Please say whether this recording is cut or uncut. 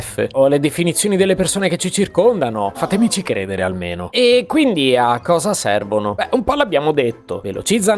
cut